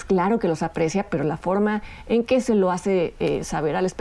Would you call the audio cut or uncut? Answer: uncut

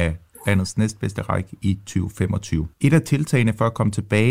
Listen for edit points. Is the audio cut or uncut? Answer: cut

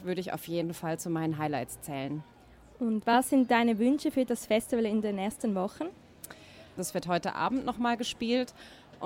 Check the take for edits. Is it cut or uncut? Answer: cut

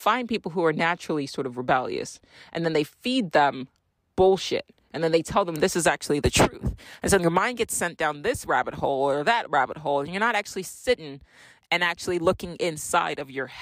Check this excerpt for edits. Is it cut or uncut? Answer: cut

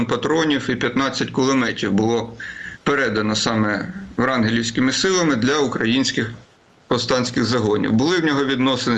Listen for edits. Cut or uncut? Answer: uncut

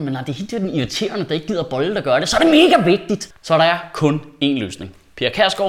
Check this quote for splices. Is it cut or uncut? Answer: uncut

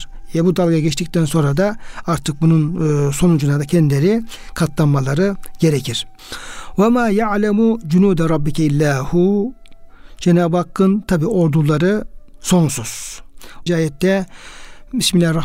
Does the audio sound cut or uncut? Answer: cut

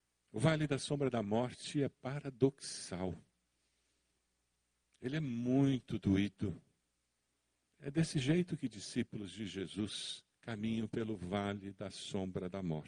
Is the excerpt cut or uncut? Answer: cut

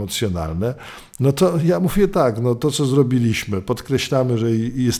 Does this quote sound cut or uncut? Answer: uncut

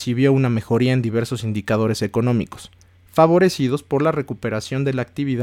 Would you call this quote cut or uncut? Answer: uncut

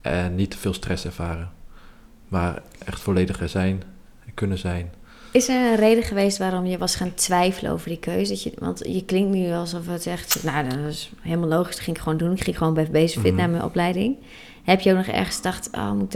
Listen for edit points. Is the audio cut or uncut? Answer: uncut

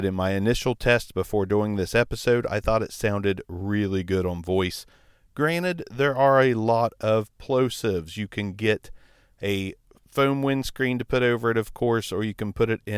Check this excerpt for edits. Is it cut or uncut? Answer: uncut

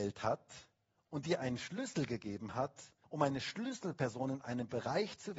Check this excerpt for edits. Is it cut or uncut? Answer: cut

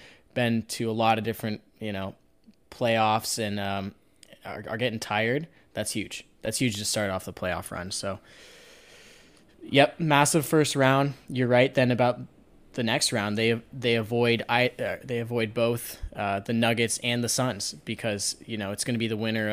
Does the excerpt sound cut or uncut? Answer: uncut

